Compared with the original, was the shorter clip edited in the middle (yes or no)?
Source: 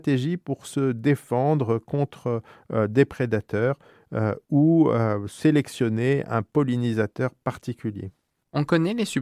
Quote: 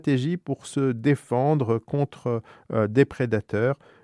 no